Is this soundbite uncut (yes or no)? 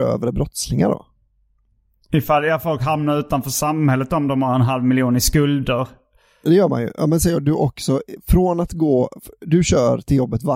yes